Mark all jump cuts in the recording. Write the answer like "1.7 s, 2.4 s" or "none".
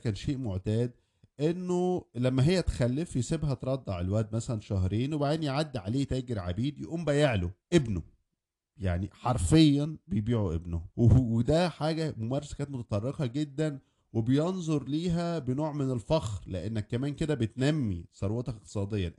7.6 s, 10.9 s